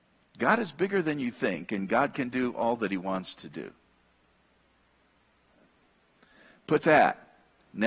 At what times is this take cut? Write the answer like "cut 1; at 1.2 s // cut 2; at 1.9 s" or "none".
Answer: none